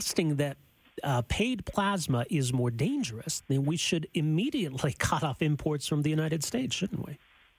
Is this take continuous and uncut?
yes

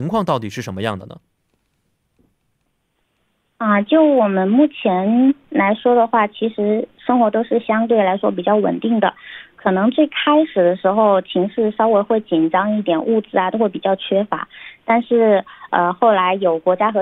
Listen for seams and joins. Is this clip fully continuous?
yes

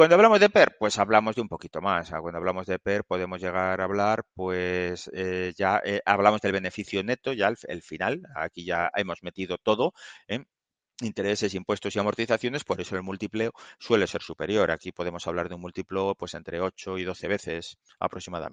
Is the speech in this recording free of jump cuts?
yes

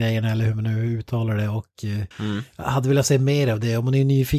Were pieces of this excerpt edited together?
yes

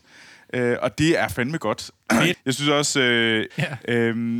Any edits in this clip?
yes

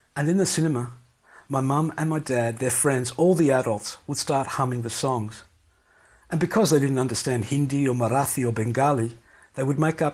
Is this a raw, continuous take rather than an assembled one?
yes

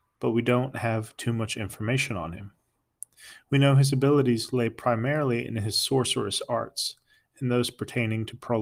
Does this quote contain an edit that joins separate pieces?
no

